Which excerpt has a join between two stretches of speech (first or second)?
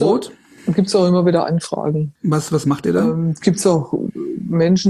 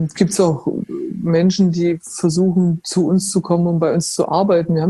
first